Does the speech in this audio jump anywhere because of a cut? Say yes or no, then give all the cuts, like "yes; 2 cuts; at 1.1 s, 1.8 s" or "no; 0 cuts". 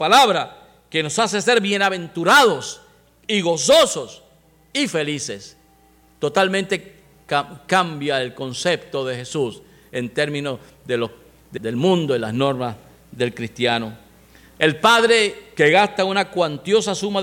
yes; 1 cut; at 11.6 s